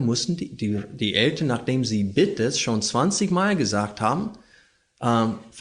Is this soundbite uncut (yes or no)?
yes